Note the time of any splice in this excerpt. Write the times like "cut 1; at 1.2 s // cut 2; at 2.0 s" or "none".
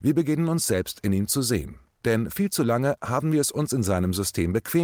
none